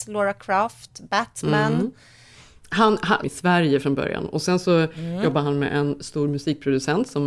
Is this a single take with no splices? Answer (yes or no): no